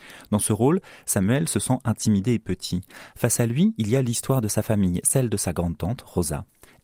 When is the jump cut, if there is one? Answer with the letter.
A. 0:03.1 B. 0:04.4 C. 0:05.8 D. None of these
D